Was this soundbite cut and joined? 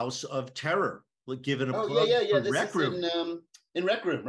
no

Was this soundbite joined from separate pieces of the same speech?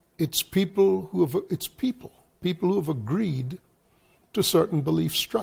no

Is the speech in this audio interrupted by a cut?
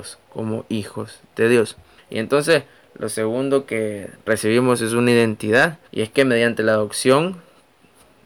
yes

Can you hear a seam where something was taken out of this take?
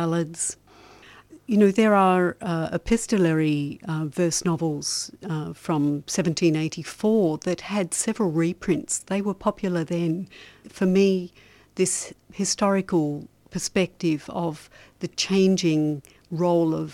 no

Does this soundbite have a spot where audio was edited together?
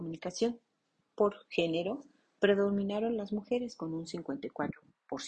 yes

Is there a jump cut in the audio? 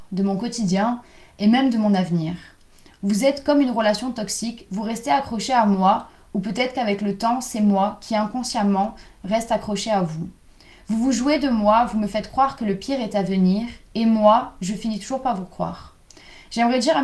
yes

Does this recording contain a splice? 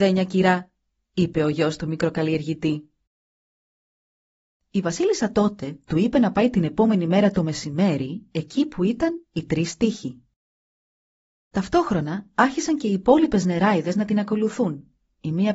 yes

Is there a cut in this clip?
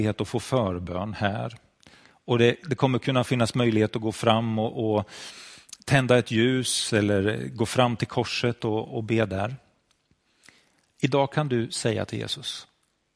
no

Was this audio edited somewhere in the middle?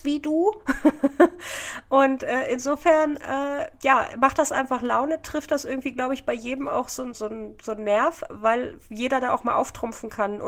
yes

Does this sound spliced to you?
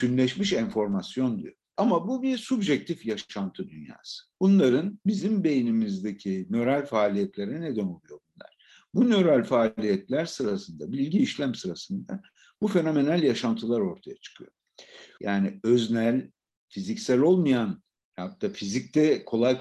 yes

